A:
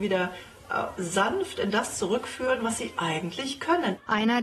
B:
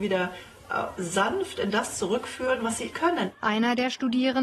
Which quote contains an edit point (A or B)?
B